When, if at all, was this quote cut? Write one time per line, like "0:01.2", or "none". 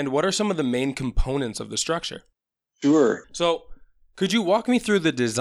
0:03.2